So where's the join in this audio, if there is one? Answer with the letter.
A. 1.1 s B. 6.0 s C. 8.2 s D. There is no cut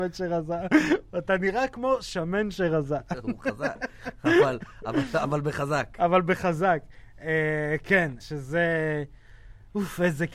C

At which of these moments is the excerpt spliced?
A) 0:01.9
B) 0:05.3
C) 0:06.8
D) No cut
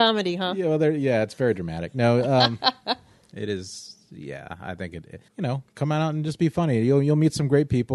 B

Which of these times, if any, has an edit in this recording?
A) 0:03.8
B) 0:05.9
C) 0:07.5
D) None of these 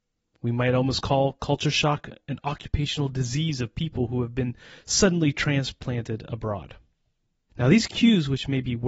C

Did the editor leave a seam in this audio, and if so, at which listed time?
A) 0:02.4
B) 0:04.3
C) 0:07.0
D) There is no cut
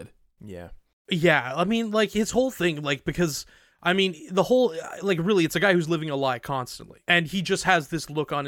C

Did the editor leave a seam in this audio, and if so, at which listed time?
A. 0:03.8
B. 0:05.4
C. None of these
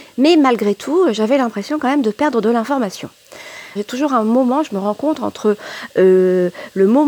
A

